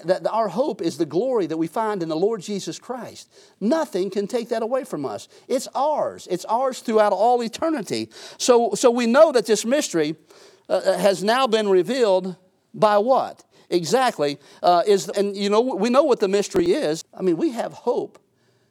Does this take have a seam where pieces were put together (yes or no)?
yes